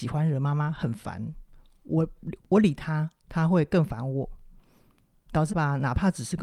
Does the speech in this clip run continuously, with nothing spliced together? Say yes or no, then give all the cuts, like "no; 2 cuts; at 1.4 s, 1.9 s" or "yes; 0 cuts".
no; 2 cuts; at 2.4 s, 5.5 s